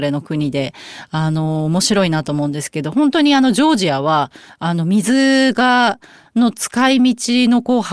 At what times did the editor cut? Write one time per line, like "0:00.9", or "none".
none